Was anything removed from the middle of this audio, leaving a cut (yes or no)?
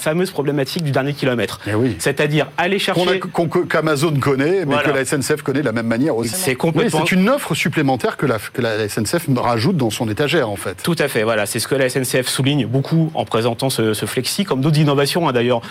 yes